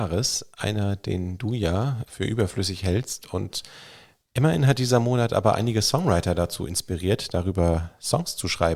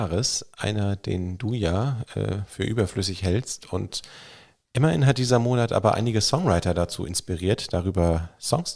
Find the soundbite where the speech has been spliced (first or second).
first